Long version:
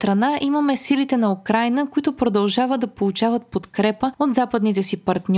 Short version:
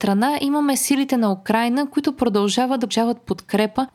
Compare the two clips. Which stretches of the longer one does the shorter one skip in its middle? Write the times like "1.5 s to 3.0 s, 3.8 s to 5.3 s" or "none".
2.9 s to 3.1 s